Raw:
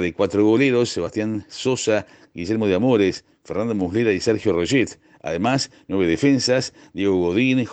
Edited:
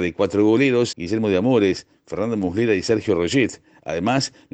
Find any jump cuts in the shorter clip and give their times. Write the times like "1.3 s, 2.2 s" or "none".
0.9 s

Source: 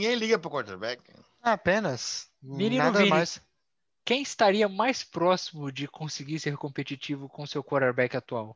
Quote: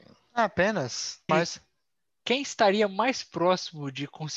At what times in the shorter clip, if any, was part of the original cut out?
1.3 s

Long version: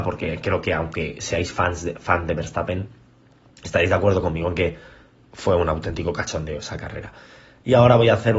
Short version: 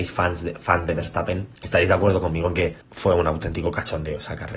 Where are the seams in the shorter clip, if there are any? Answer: 1.6 s, 2.8 s

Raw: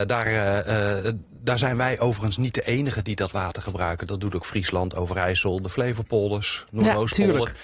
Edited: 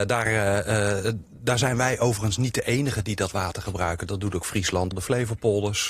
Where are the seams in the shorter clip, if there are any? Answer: 4.9 s

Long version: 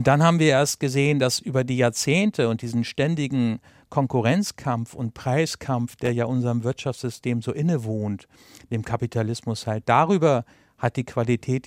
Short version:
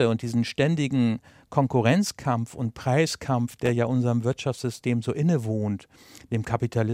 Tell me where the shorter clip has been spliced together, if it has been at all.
none

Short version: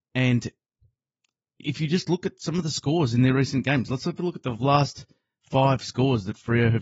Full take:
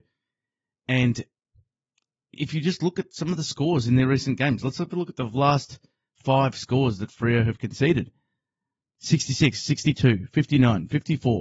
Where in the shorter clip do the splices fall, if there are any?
none

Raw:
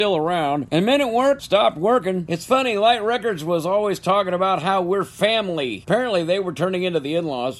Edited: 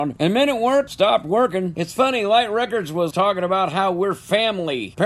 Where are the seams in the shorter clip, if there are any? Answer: 3.1 s

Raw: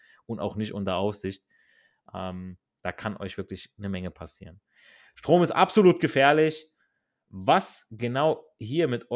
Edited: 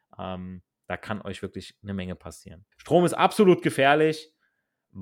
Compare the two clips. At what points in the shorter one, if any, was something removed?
2.7 s

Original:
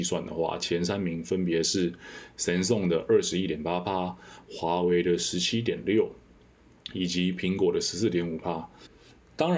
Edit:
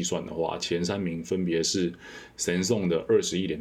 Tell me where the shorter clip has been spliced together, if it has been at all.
none

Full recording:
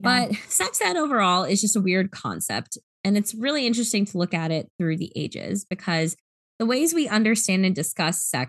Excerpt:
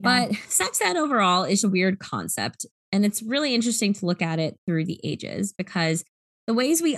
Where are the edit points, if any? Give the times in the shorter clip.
1.6 s

